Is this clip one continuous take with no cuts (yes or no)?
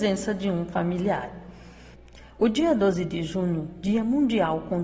yes